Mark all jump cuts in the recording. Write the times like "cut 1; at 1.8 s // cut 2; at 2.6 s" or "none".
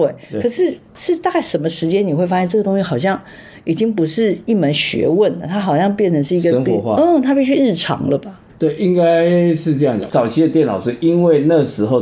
cut 1; at 8.5 s // cut 2; at 10.1 s